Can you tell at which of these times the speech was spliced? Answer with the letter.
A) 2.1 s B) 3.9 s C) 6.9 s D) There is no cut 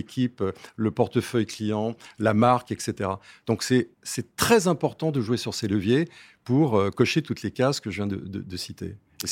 B